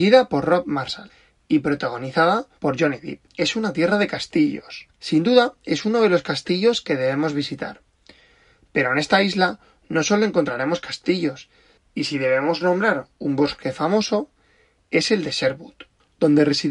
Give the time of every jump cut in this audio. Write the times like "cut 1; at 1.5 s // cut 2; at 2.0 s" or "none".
cut 1; at 2.6 s // cut 2; at 4.9 s

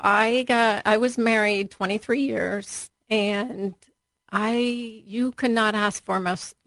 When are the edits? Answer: cut 1; at 2.9 s

